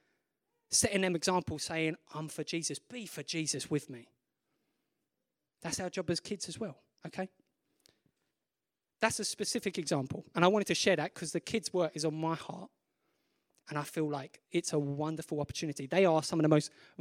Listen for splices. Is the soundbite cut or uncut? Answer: uncut